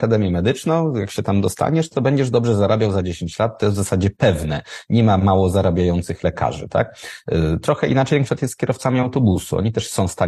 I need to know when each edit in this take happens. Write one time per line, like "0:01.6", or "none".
none